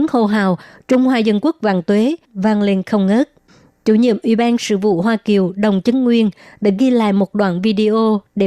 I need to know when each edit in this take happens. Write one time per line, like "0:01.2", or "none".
0:02.3